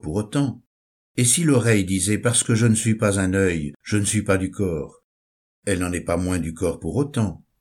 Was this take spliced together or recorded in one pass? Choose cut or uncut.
uncut